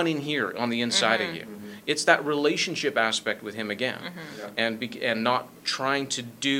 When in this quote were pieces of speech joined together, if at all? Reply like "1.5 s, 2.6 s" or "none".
5.6 s

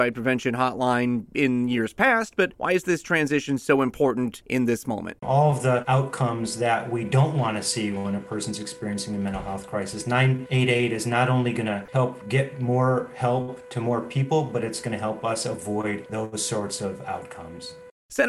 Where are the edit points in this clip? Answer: 5.2 s

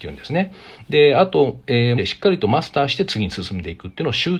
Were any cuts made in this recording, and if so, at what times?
2.0 s

